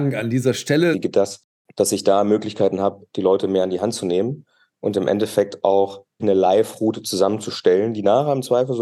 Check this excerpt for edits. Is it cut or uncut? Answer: cut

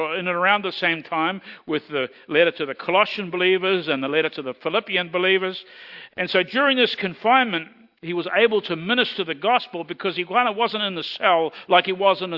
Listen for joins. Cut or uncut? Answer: cut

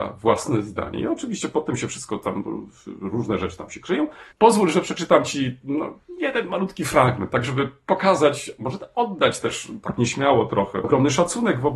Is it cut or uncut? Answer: cut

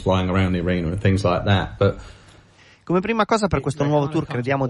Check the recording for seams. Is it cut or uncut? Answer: uncut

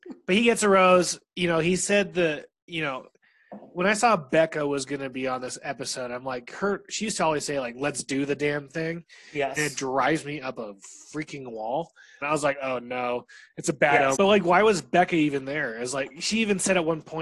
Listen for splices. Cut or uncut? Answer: cut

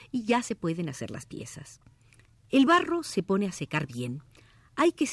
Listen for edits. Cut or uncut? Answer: cut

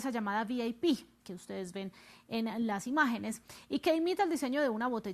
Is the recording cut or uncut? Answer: cut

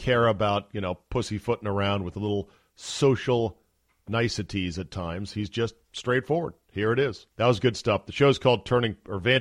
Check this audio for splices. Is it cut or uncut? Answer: cut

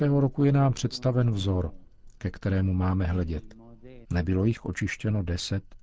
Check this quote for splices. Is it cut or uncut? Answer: cut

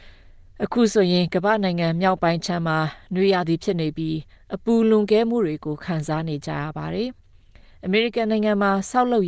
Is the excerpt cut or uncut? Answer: uncut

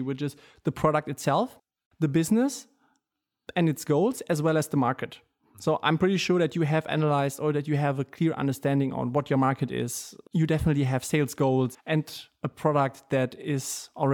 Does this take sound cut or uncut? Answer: cut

